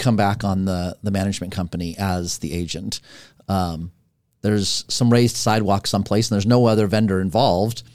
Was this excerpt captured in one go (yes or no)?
yes